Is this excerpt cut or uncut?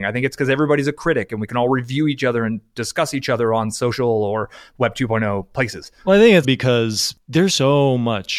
cut